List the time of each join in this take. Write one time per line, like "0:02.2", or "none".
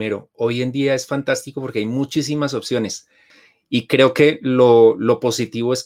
none